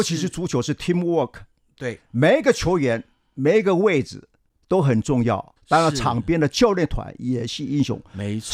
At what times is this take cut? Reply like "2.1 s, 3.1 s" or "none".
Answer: 5.6 s

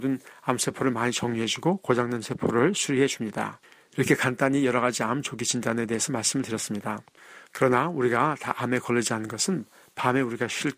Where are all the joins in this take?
3.9 s, 7.4 s

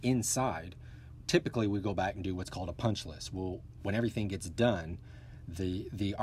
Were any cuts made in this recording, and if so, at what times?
none

